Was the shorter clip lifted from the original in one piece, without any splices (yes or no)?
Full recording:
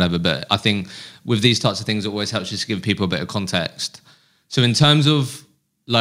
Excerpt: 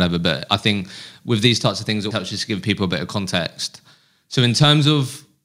no